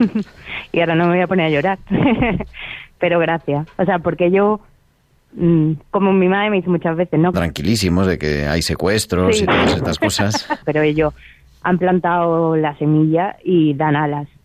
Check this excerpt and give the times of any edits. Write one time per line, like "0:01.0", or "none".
0:07.3
0:10.6

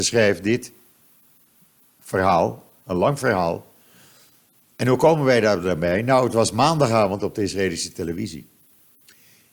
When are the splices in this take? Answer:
none

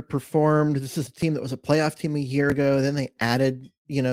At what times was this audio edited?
none

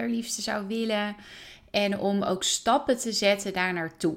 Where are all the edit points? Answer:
none

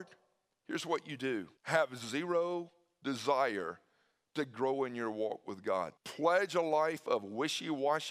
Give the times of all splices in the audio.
0:01.6
0:06.0

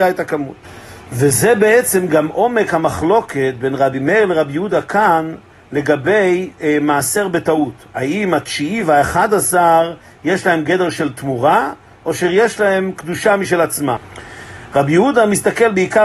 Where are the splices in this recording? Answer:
none

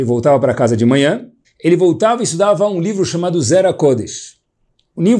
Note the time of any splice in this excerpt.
0:01.4

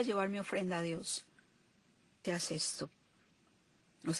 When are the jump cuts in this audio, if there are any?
0:02.2

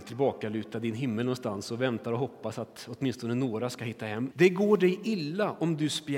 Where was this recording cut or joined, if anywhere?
0:04.3

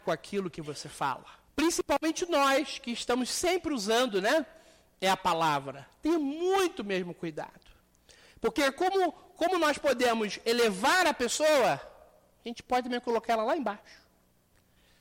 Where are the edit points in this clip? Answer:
0:01.5

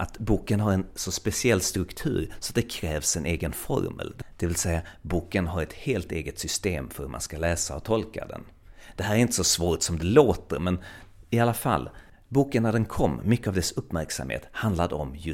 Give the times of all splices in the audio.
none

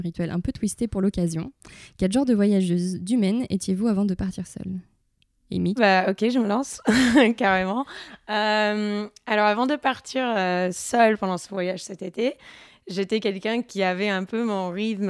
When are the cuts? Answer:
0:05.8

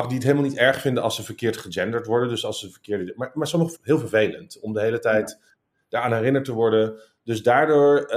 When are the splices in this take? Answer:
0:03.7

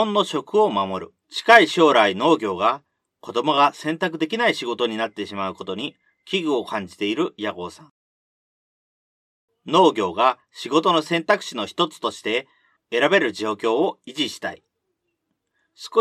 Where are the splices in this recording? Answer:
0:01.2

